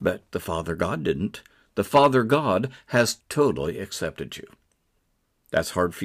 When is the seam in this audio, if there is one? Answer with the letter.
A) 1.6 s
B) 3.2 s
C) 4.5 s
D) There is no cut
B